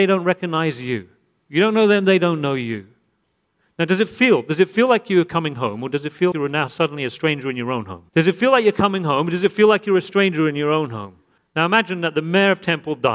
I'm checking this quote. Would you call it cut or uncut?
cut